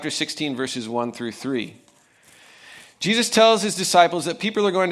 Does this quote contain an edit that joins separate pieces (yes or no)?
no